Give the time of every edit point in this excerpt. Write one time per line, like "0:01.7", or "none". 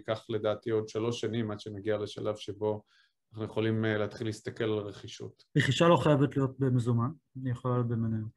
0:05.5